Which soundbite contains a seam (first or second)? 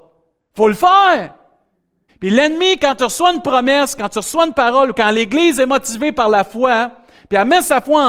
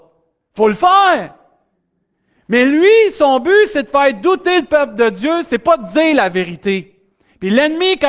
first